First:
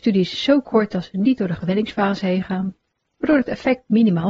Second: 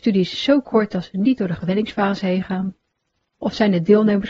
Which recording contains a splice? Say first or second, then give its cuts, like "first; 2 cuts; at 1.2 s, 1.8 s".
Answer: first; 1 cut; at 3.1 s